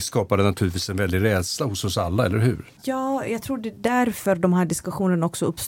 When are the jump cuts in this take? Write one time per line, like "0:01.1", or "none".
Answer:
none